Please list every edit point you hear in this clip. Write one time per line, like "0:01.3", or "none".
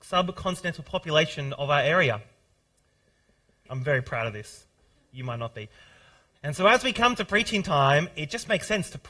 0:03.7
0:06.3